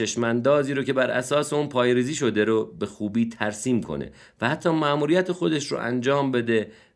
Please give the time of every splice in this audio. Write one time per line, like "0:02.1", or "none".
none